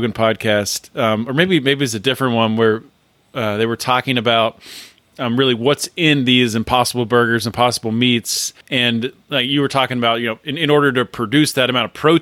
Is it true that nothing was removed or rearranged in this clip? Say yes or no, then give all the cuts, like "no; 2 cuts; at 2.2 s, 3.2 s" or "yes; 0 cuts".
no; 1 cut; at 8.6 s